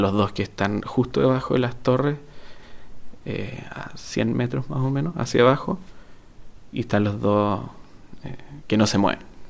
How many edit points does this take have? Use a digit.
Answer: 0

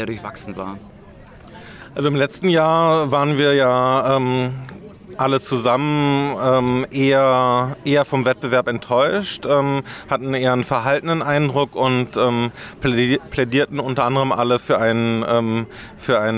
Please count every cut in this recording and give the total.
0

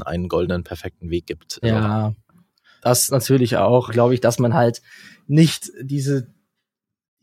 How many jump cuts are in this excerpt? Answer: 2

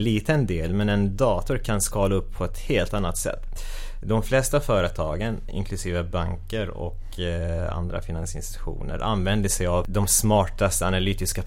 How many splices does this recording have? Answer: 1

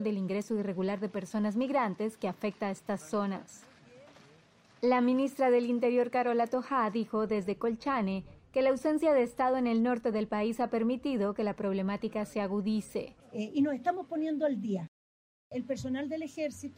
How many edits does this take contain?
2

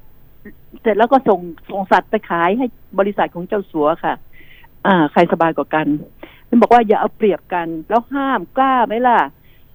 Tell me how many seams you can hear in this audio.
1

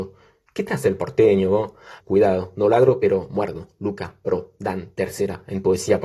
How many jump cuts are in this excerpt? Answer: 1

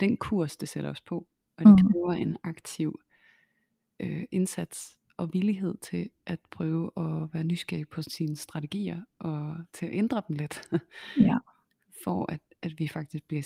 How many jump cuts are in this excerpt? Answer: 0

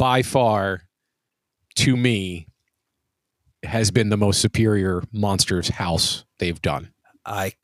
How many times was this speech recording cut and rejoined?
0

